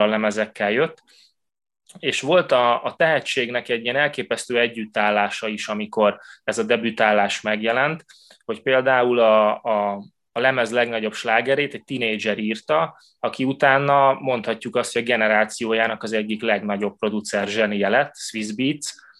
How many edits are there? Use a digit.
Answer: 0